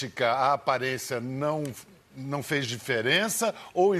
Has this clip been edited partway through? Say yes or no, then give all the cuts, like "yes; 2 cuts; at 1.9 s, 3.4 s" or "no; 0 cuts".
no; 0 cuts